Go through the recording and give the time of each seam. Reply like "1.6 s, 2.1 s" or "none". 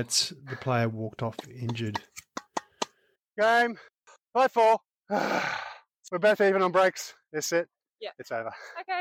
7.2 s